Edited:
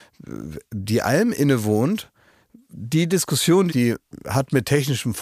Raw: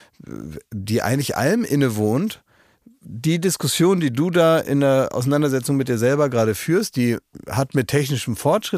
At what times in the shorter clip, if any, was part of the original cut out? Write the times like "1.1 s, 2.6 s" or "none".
1.0 s, 3.7 s